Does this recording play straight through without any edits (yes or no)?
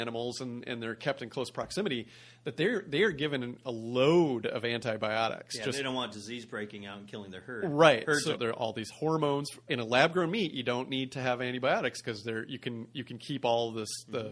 no